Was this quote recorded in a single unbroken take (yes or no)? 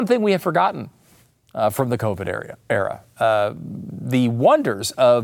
yes